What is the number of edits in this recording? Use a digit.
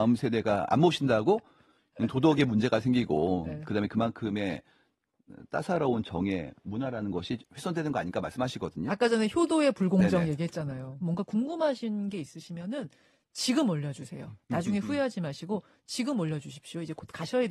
1